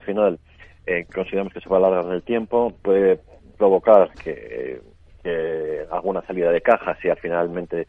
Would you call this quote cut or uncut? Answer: cut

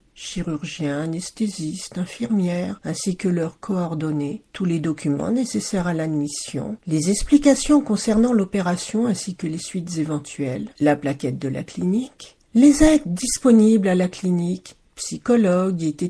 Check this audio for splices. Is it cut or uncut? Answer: uncut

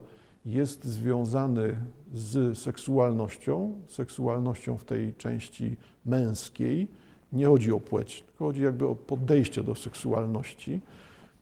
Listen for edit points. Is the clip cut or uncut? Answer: uncut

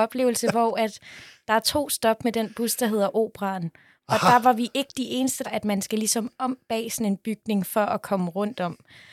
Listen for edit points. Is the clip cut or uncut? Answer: cut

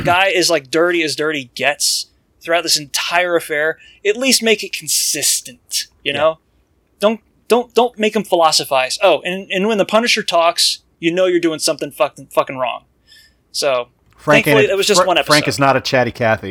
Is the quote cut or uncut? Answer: uncut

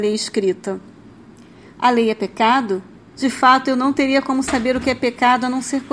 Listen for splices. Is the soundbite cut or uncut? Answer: cut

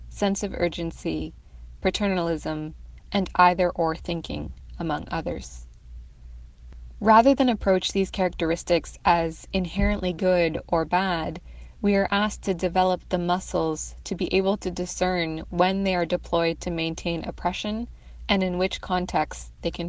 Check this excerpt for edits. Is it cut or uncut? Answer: uncut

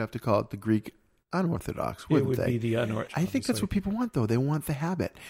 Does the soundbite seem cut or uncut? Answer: cut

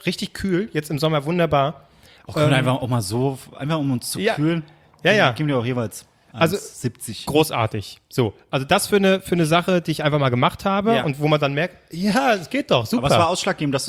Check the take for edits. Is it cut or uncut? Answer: uncut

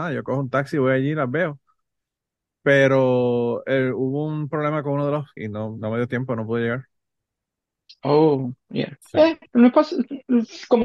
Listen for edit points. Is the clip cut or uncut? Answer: cut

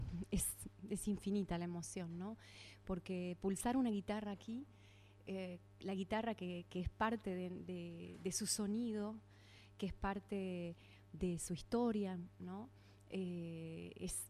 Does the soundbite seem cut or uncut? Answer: uncut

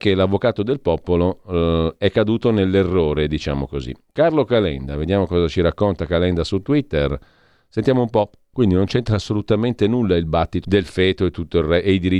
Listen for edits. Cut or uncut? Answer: cut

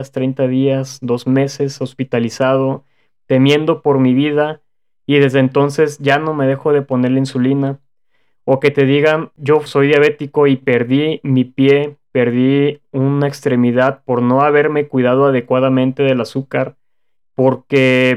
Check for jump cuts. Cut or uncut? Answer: uncut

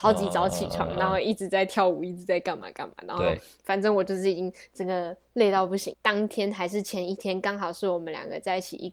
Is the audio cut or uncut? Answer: cut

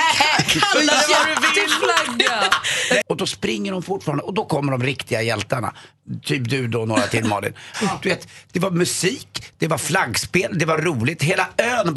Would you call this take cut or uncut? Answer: cut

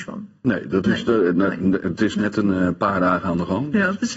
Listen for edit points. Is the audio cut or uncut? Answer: uncut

